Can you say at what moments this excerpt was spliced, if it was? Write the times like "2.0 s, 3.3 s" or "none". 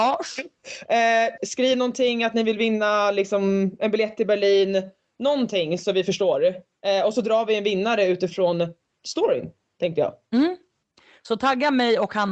1.4 s